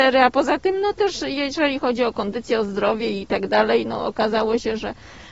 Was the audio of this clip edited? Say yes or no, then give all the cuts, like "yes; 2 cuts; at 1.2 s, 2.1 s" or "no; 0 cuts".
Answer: no; 0 cuts